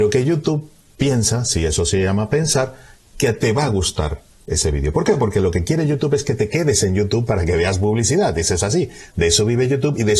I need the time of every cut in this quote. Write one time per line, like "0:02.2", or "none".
none